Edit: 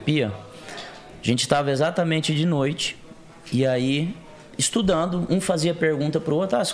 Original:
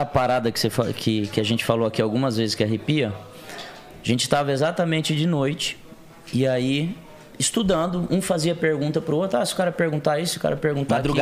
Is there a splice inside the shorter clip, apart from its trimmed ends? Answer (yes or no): no